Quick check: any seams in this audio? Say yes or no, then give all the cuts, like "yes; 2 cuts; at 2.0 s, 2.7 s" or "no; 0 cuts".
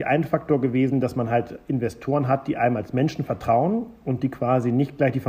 no; 0 cuts